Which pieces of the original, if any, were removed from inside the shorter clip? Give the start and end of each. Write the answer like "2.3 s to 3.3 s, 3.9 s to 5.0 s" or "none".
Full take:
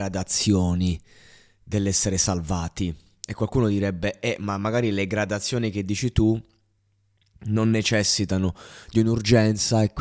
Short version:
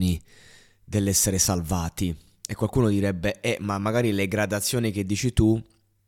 none